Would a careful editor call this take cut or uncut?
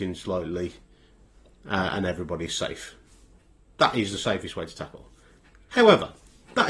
uncut